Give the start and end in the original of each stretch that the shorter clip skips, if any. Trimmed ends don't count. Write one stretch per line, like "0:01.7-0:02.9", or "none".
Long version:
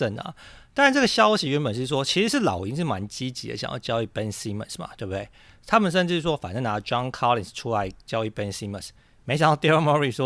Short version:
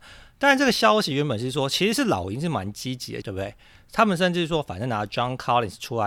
0:03.6-0:05.0